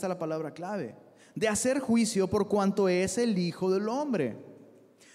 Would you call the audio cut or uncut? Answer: uncut